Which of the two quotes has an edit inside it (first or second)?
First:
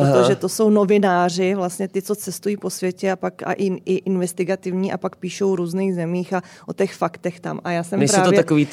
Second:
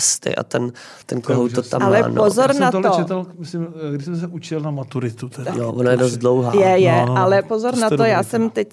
second